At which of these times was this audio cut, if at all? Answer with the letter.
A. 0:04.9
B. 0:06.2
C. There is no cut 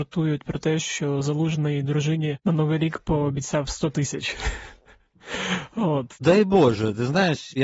B